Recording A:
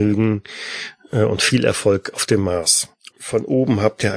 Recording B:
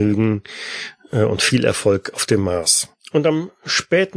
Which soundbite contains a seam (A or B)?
A